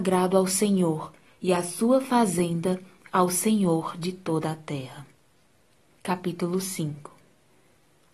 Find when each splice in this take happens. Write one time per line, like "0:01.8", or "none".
none